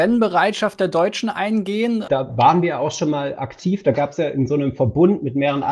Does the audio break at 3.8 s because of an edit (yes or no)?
no